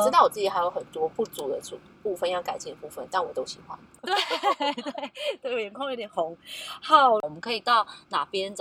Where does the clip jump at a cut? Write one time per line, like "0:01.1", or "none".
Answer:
0:04.0
0:07.2

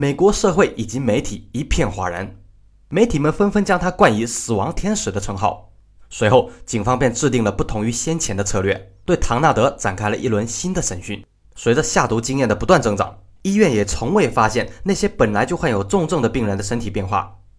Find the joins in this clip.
0:06.0
0:11.4

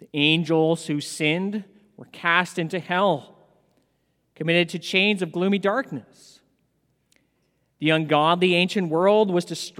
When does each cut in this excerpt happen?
none

